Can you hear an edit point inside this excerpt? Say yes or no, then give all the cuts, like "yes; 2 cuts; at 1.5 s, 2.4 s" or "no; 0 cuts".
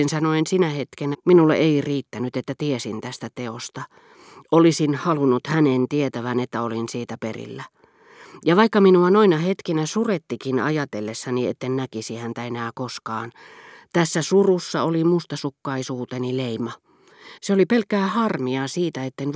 yes; 2 cuts; at 1.1 s, 17.4 s